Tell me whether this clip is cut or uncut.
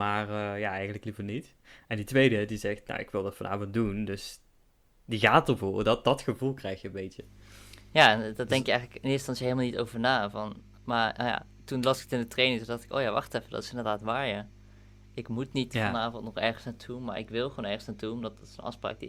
uncut